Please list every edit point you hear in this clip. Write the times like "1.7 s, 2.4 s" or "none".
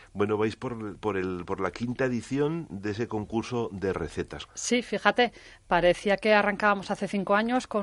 4.5 s